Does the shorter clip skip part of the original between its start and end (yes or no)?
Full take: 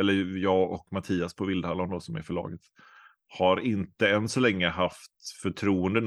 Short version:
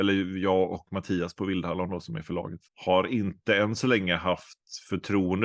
yes